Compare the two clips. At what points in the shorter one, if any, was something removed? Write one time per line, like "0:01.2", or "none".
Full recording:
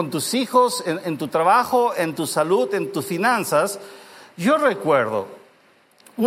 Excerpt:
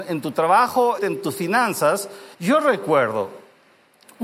0:01.0
0:02.3